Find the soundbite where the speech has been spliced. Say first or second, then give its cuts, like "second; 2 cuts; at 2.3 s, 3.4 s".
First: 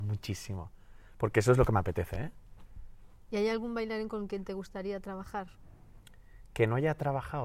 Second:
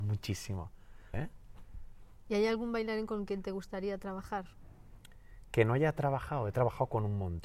second; 1 cut; at 1.1 s